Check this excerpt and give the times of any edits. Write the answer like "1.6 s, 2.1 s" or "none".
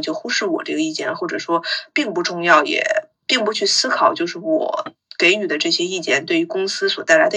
none